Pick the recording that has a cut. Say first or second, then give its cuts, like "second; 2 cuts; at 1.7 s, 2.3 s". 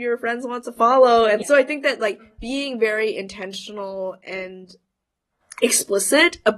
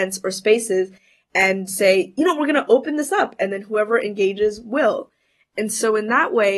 first; 1 cut; at 1.4 s